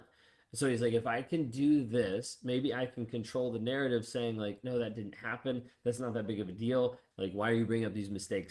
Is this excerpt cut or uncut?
cut